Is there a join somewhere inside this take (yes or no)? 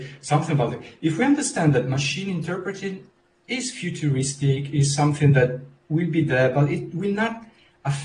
no